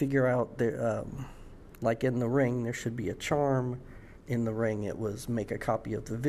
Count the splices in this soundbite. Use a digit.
1